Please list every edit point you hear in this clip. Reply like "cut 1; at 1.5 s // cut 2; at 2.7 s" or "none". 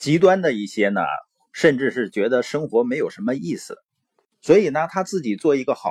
cut 1; at 4.3 s